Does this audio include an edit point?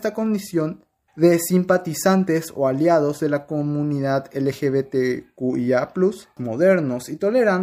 yes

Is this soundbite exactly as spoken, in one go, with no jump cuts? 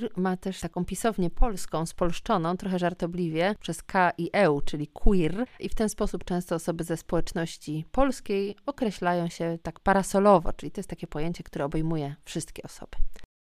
yes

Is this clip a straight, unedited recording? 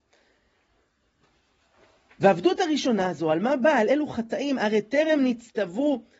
yes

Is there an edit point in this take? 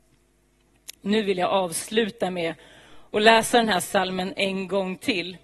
no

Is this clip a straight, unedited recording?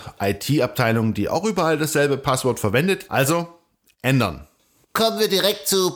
no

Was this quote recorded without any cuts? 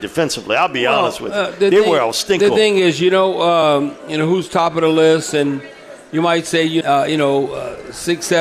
no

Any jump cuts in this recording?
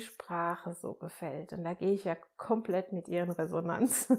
no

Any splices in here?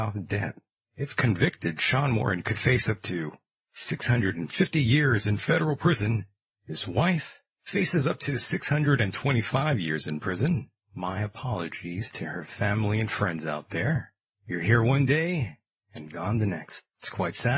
yes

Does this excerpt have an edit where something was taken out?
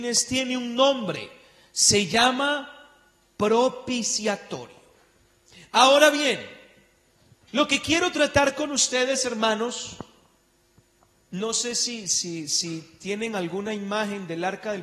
no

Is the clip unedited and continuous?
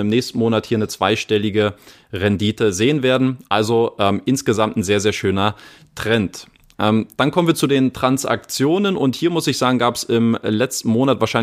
yes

